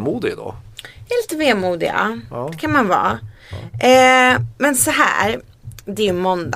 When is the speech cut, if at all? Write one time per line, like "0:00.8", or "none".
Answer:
none